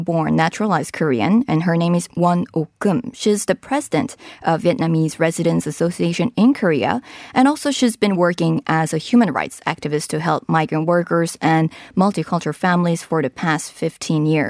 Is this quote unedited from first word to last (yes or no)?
yes